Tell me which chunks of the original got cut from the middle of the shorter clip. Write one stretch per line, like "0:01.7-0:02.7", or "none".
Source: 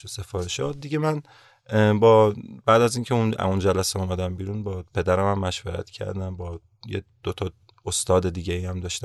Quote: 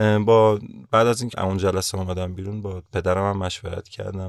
0:03.1-0:03.3